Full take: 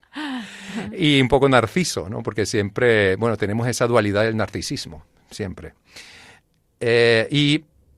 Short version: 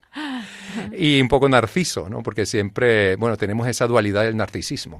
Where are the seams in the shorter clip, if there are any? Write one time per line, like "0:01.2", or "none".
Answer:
none